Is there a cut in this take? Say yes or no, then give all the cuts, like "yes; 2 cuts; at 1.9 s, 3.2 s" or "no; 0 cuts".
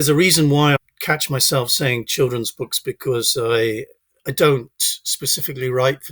no; 0 cuts